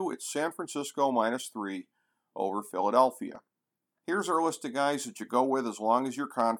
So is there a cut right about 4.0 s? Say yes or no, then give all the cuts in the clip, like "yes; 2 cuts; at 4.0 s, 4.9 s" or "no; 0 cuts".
yes; 1 cut; at 4.0 s